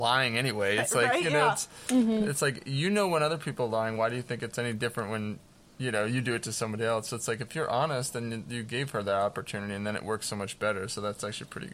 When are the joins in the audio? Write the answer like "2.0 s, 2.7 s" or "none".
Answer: none